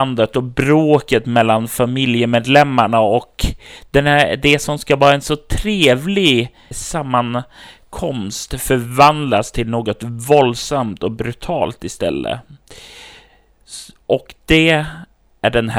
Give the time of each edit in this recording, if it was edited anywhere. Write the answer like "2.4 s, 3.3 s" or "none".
none